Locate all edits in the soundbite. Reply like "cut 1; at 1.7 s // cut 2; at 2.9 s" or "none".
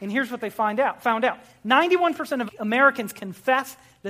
cut 1; at 2.5 s